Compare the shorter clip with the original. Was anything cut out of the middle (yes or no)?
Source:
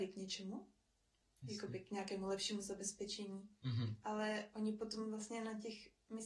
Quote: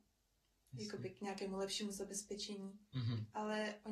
no